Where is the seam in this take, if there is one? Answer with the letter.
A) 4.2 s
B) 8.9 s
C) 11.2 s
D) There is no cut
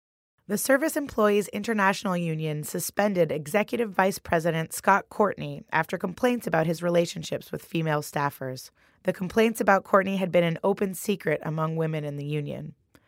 B